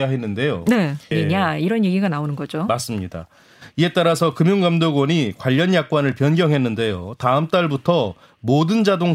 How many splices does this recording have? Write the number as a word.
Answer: one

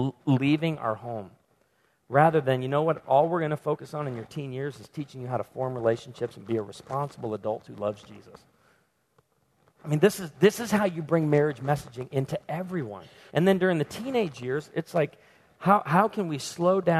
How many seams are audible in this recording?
one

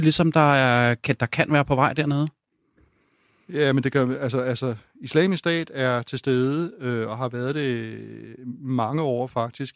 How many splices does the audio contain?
zero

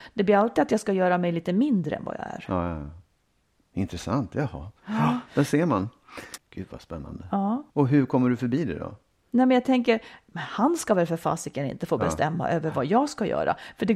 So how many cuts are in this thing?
two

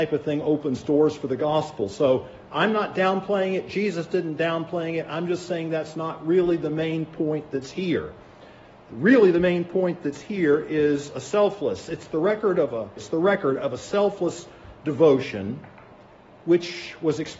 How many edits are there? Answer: one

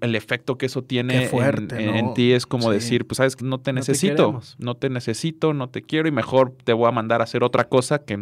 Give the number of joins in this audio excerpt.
one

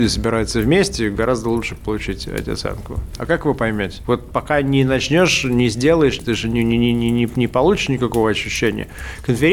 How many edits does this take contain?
two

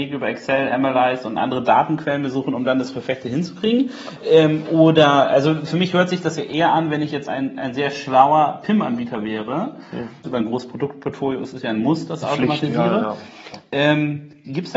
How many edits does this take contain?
two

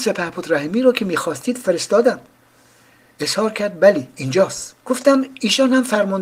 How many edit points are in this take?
one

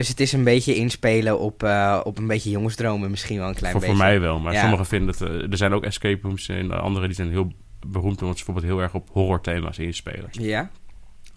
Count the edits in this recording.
two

